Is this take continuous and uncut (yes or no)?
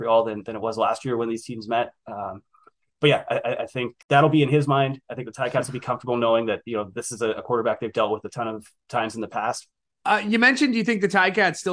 no